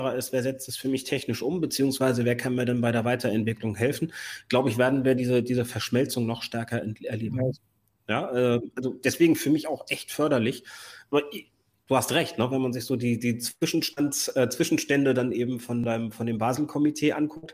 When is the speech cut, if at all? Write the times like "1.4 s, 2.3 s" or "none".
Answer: none